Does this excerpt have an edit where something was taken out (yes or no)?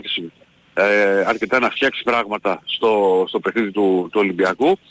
no